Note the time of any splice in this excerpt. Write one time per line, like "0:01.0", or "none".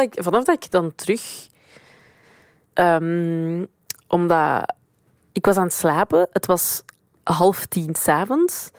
0:02.7